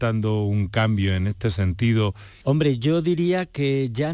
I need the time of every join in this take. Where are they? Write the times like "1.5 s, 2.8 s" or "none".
2.4 s